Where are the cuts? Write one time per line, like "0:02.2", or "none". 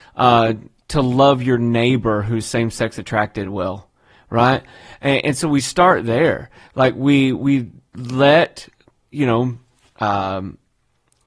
none

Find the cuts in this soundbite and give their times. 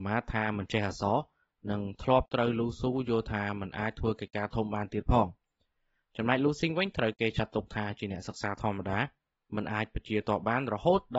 none

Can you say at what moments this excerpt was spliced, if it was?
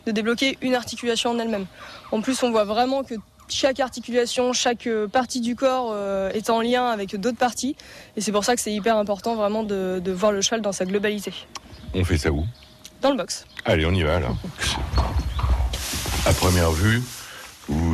none

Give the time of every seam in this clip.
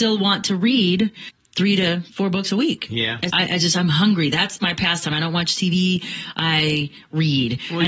0:03.3

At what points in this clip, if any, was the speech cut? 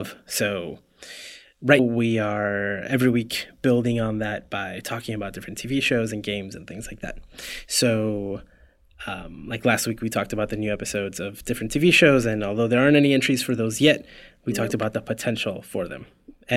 0:01.8

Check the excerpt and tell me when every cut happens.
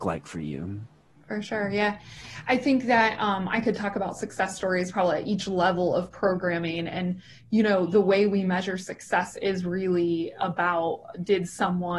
none

